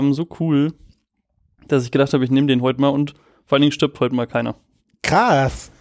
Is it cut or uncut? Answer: uncut